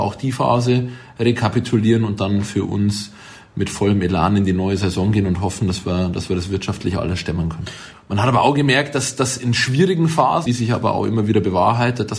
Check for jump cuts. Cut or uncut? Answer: cut